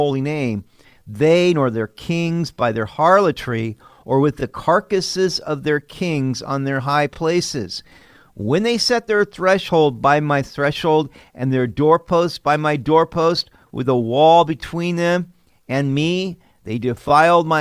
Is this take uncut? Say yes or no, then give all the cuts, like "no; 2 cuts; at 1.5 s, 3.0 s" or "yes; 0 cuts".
yes; 0 cuts